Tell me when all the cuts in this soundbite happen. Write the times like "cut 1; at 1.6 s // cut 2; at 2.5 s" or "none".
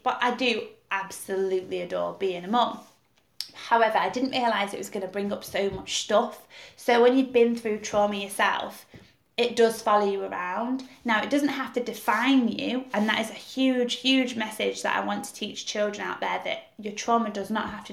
none